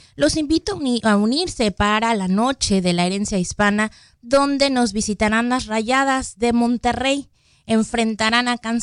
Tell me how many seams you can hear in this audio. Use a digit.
0